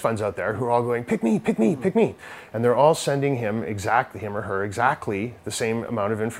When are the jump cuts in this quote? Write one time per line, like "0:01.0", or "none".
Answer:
none